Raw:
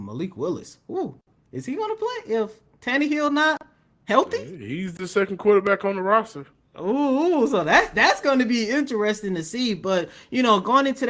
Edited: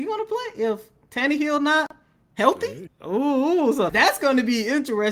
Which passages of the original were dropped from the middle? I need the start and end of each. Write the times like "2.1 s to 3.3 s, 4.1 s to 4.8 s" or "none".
4.6 s to 6.6 s, 7.6 s to 7.9 s